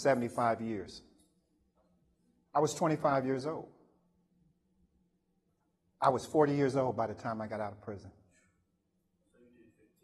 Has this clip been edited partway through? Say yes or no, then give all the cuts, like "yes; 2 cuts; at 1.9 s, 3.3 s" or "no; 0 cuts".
no; 0 cuts